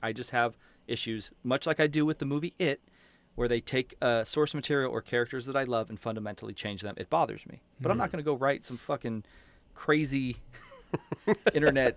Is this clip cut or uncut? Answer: uncut